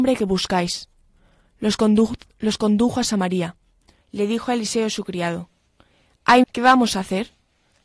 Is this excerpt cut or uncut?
cut